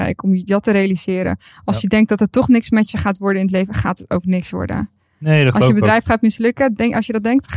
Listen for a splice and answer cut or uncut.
uncut